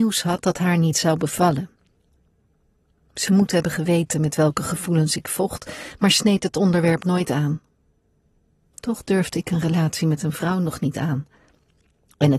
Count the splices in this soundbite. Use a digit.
1